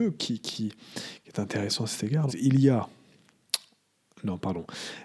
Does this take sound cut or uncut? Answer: cut